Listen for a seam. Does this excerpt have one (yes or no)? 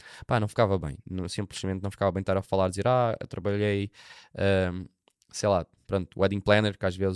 no